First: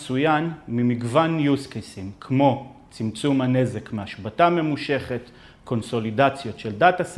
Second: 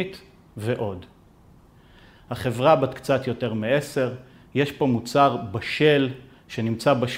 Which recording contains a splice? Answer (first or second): second